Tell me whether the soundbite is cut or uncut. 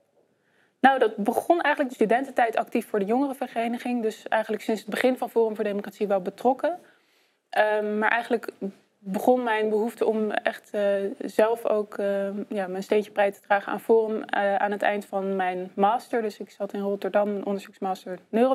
cut